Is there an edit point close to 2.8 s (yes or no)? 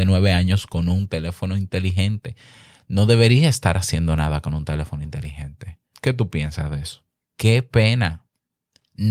no